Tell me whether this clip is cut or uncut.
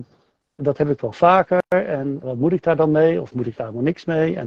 cut